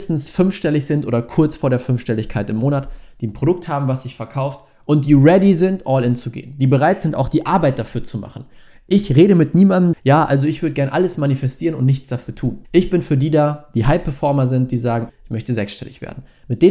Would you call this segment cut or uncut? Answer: cut